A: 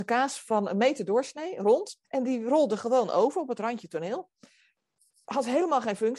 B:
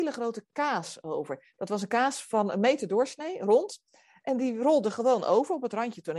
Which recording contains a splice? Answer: A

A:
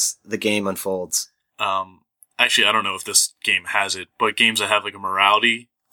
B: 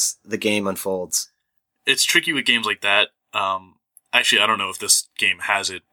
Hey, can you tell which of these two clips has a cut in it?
A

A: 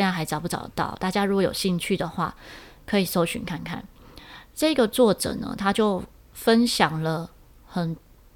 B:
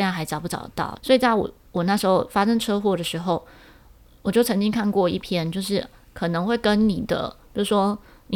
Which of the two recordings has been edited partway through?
B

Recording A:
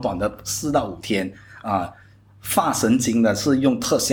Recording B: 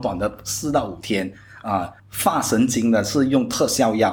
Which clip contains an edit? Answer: B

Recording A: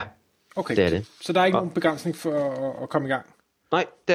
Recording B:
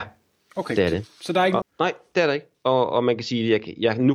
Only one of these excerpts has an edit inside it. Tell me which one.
B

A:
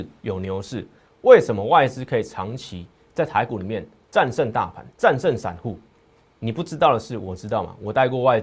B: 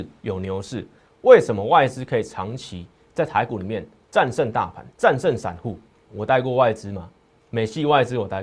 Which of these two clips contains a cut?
B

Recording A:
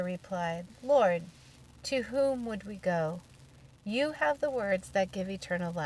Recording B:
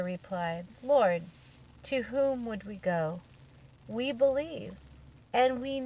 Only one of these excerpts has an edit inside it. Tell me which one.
B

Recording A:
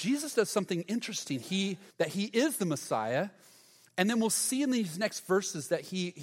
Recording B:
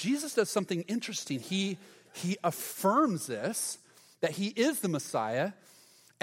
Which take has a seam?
A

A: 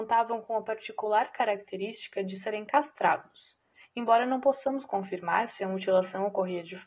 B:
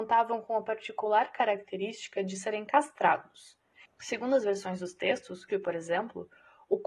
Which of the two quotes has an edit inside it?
B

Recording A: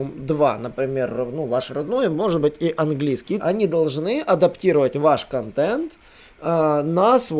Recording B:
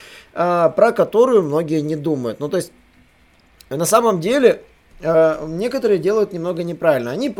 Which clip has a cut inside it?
A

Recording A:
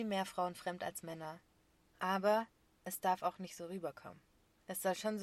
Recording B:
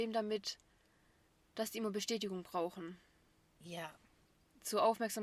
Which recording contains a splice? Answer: A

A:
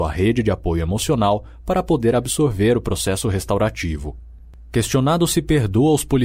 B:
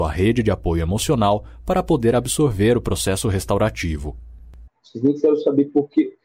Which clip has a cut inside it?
B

